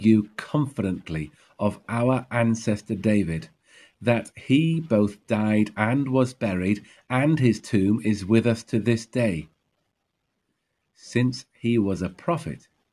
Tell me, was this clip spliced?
no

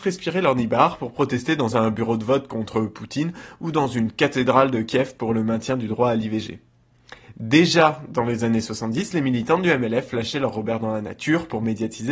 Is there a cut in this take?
no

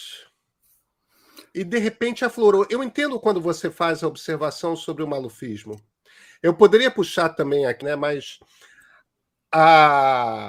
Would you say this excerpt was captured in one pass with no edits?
no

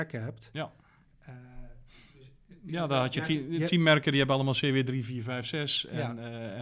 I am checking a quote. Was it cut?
no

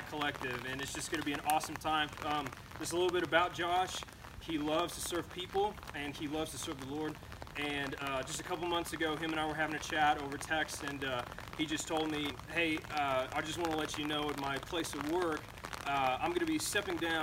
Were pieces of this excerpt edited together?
yes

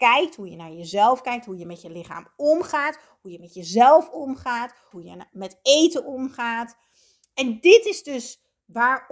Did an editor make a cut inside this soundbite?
yes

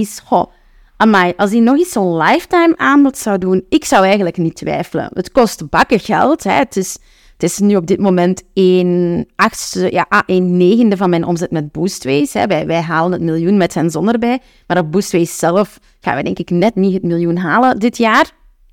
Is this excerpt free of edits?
yes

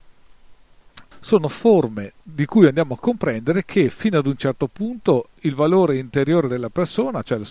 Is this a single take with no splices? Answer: no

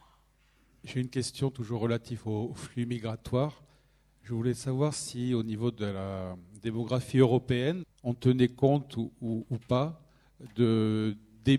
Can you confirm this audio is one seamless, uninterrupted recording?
no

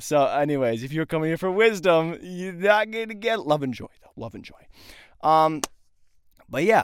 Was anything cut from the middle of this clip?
no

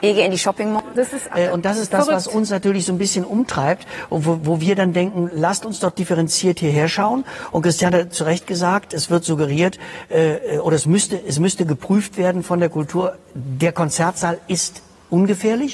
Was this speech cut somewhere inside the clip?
yes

